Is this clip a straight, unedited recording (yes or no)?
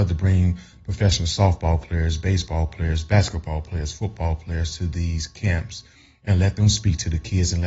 yes